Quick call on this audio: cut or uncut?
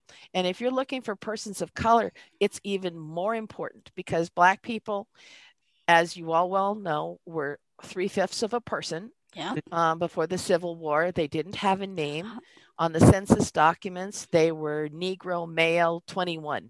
uncut